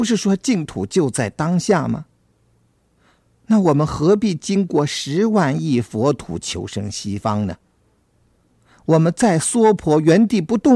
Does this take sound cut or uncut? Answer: uncut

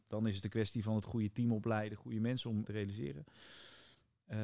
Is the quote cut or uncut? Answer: cut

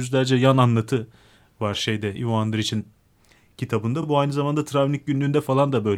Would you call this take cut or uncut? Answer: uncut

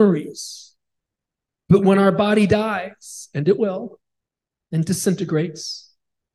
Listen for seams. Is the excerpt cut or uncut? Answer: uncut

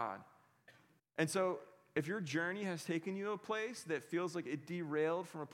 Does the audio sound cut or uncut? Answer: cut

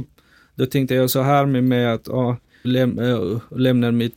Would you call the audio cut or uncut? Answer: cut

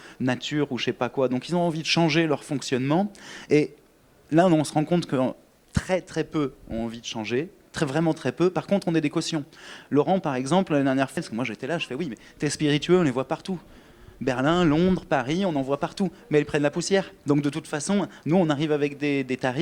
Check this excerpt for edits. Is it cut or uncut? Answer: cut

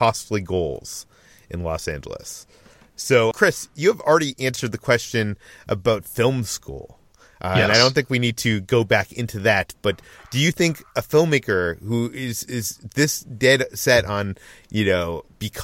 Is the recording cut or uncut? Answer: cut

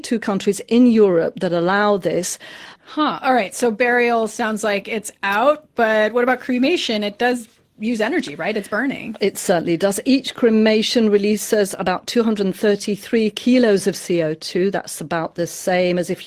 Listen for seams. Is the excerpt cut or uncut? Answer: cut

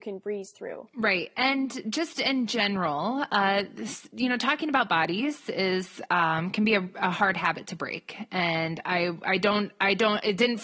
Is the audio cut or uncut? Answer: uncut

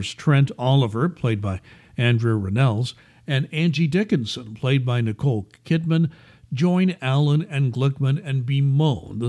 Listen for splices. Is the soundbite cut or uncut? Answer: uncut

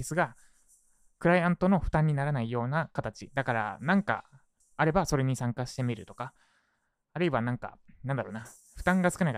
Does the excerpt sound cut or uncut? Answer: cut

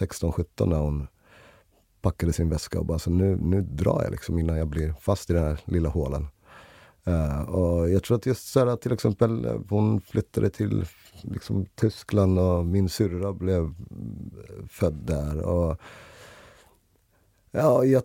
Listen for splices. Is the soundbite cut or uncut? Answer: uncut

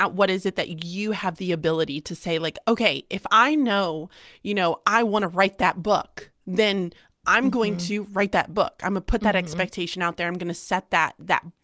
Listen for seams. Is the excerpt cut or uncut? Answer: uncut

